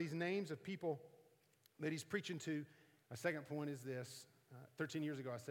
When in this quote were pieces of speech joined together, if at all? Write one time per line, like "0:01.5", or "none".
0:03.0